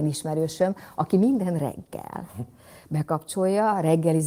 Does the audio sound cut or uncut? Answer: uncut